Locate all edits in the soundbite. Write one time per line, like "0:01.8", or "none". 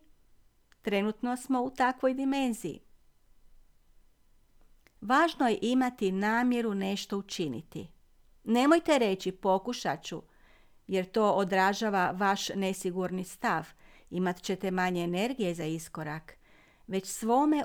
none